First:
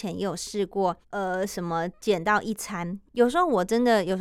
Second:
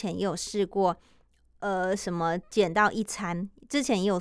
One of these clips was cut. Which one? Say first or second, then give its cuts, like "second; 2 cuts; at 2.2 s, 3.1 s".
first; 2 cuts; at 1.0 s, 3.1 s